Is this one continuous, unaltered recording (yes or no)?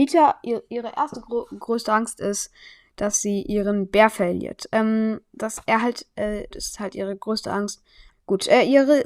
no